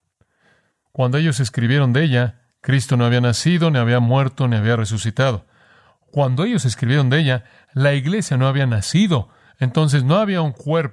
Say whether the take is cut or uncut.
uncut